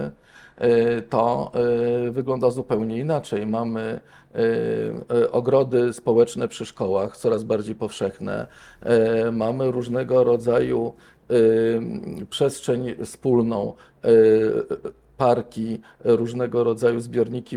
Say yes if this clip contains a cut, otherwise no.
no